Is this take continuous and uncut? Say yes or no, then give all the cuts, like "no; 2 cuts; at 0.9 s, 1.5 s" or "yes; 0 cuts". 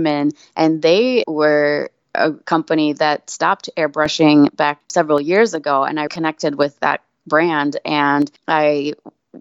no; 2 cuts; at 1.2 s, 6.1 s